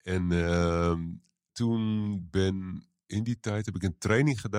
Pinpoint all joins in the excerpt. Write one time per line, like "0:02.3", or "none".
0:01.5